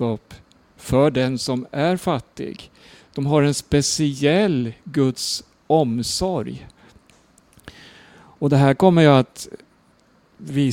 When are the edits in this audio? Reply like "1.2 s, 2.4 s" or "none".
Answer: none